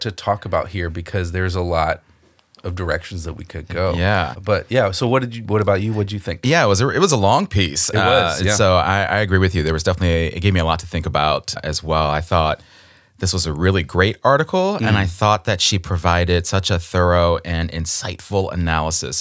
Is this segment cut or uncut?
uncut